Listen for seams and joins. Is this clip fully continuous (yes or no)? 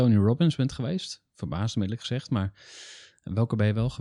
yes